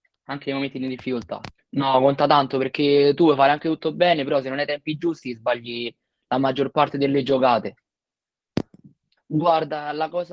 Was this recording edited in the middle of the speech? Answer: yes; 2 cuts; at 1.6 s, 9.2 s

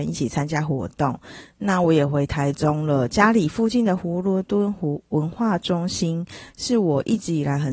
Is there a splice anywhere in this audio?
no; 0 cuts

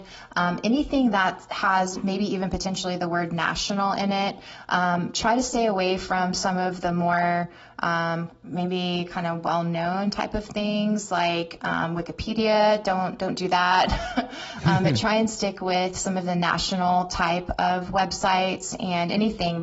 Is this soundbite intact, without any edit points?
yes; 0 cuts

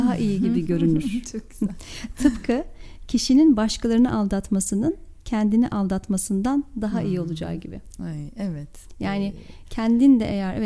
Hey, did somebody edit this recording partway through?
no; 0 cuts

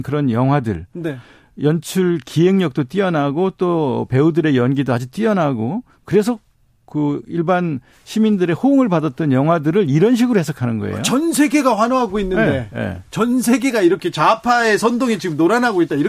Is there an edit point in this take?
no; 0 cuts

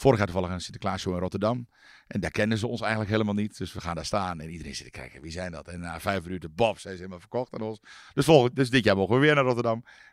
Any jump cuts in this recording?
no; 0 cuts

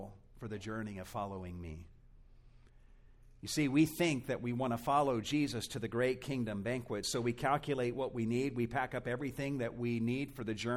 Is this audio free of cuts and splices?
yes; 0 cuts

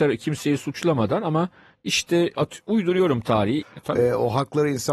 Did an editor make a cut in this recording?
yes; 1 cut; at 3.6 s

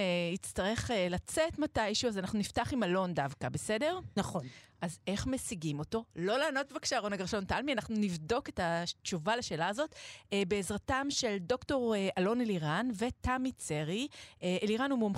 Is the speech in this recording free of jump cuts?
no; 1 cut; at 4.2 s

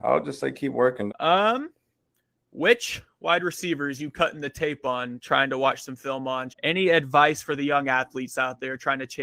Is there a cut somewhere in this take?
yes; 2 cuts; at 1.1 s, 6.5 s

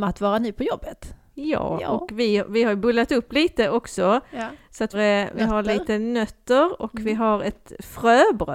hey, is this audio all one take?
no; 1 cut; at 4.9 s

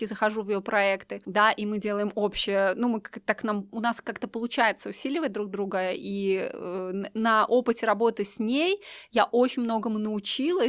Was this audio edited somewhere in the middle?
no; 0 cuts

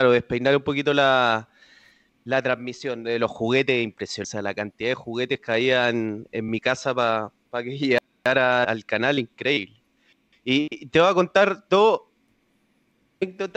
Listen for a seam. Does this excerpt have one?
yes; 1 cut; at 8.6 s

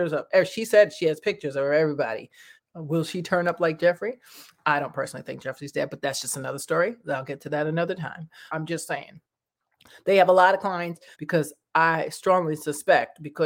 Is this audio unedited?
no; 3 cuts; at 2.6 s, 8.5 s, 11.1 s

